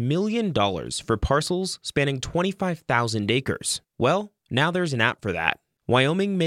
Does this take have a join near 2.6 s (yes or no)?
no